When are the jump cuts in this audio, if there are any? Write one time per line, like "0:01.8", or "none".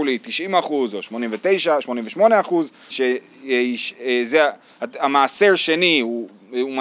0:02.9